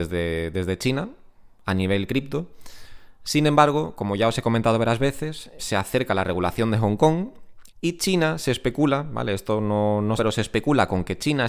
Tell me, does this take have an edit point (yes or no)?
yes